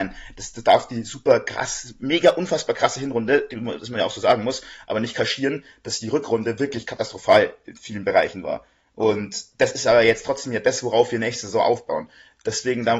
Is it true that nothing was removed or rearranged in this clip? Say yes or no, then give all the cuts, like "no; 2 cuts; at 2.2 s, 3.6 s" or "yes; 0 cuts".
yes; 0 cuts